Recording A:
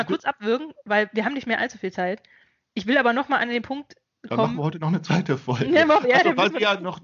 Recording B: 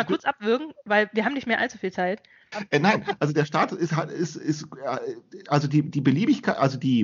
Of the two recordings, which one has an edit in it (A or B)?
B